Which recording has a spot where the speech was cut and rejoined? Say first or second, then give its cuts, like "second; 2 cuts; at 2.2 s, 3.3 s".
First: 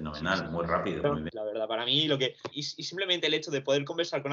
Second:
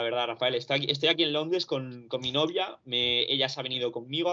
first; 2 cuts; at 1.3 s, 2.5 s